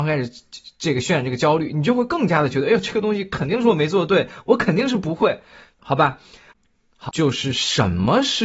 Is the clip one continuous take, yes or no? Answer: no